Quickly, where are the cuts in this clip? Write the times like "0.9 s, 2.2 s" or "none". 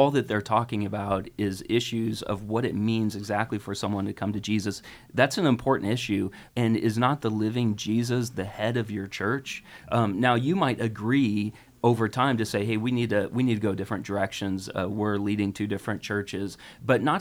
6.5 s